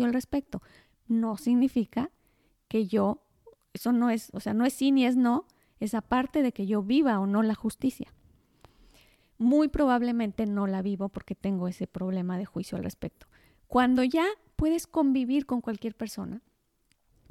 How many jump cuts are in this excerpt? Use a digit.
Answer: 0